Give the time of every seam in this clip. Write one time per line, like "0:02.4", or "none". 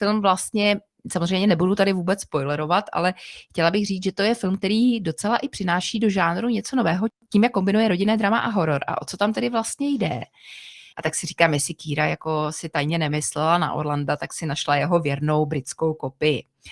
0:10.9

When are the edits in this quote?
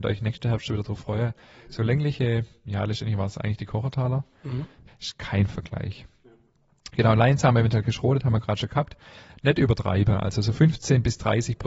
0:02.7
0:04.9

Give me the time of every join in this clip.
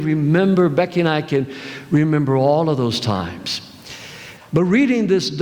0:04.4

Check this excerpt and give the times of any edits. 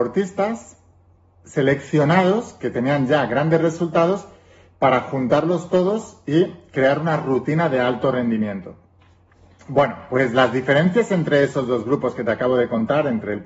none

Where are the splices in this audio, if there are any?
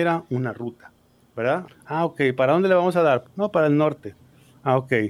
0:01.6
0:03.2

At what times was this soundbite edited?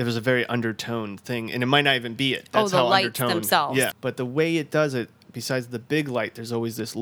0:03.9

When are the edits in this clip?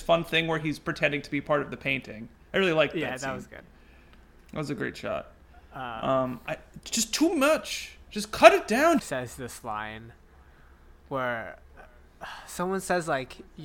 0:09.0

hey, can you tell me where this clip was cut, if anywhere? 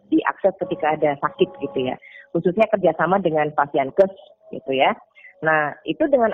none

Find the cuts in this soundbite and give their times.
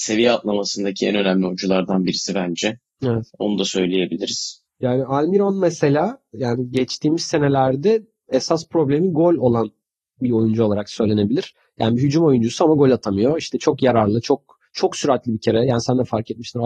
0:03.3

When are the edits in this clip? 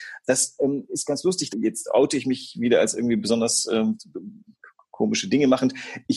0:01.5

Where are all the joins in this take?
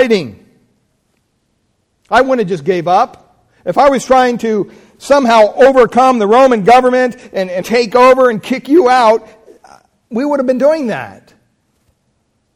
0:07.6

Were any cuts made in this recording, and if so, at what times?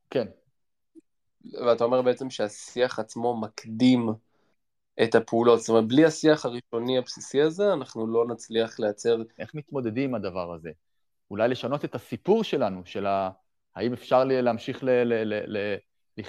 0:09.4

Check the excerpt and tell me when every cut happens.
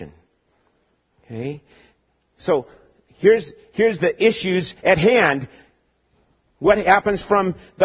none

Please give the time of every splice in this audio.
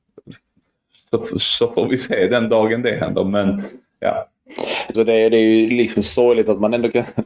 0:04.9

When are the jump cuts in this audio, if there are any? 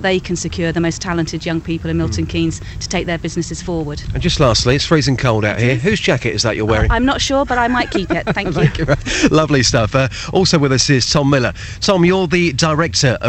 none

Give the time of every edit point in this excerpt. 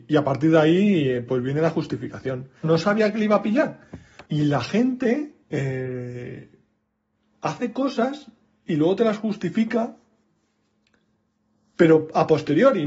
0:02.6
0:04.2
0:05.4

